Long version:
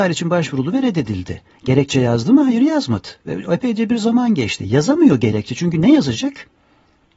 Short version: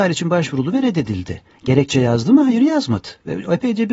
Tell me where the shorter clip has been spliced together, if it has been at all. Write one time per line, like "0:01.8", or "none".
none